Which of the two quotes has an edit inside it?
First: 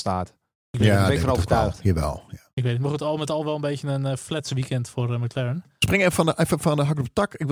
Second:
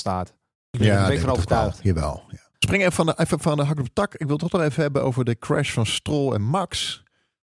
second; 1 cut; at 2.5 s

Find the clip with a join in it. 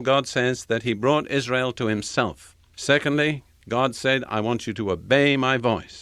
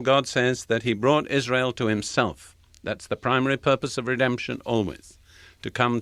first; 1 cut; at 2.7 s

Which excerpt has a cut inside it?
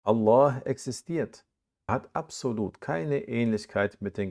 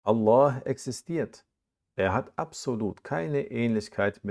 first; 1 cut; at 1.9 s

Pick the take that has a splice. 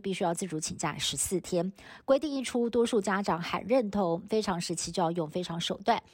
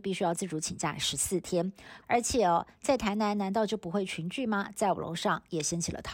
second; 1 cut; at 2.0 s

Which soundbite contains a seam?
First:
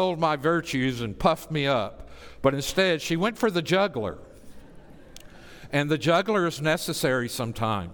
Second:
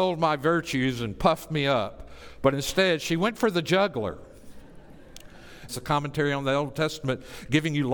second; 1 cut; at 5.7 s

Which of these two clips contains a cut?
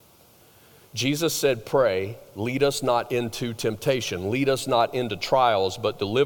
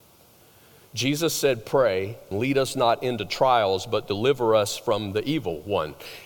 second; 1 cut; at 2.3 s

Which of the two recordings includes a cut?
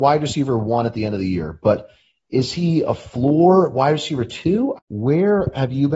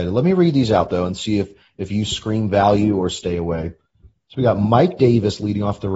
first; 1 cut; at 4.7 s

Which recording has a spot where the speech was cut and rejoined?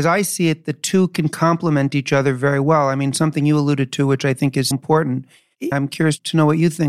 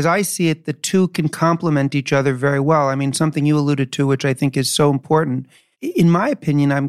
first; 2 cuts; at 4.7 s, 5.7 s

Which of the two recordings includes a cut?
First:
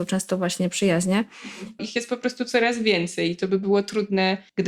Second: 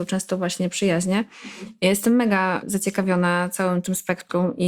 first; 1 cut; at 1.8 s

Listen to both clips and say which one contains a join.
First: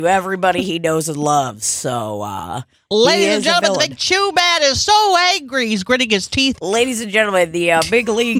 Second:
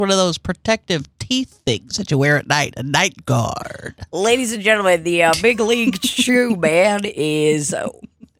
first; 2 cuts; at 4.7 s, 6.6 s

